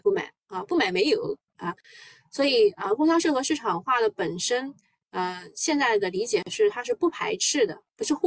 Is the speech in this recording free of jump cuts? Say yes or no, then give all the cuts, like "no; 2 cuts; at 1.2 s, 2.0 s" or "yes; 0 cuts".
yes; 0 cuts